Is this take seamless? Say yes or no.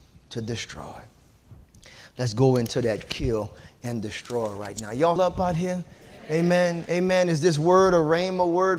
no